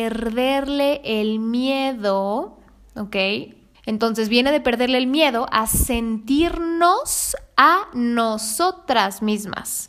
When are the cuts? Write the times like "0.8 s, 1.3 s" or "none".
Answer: 3.7 s